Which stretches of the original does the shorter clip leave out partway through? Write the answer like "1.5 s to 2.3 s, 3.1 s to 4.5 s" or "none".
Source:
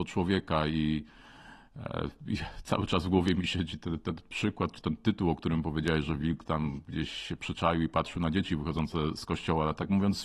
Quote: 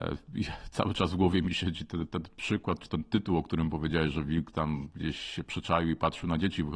none